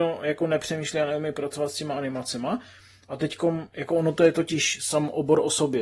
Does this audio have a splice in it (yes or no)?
no